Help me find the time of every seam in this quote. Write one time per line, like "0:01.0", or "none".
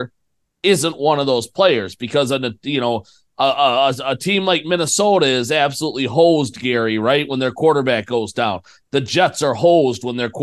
none

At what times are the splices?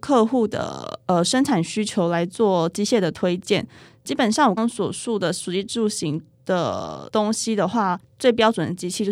0:04.6

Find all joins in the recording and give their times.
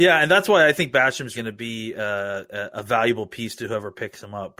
0:01.3

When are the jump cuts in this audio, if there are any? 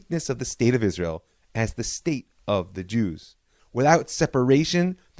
0:03.6

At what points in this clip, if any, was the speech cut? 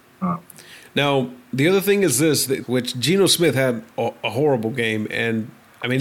0:02.6

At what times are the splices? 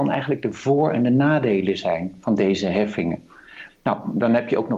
0:03.7

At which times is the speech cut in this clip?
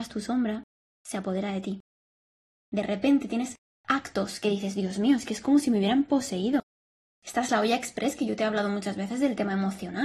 none

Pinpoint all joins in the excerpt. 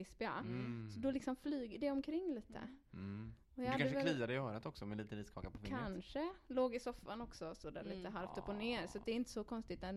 none

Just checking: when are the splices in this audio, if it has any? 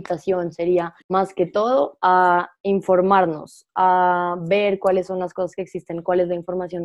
0:01.0

